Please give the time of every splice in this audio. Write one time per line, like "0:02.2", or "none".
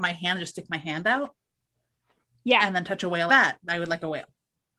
0:03.3